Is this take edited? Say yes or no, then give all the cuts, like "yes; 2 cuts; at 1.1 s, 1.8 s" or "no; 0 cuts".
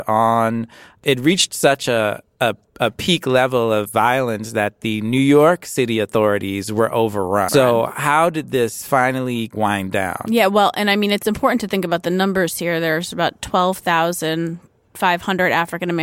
yes; 1 cut; at 7.5 s